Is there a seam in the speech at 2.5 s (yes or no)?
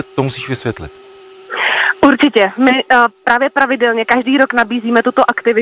no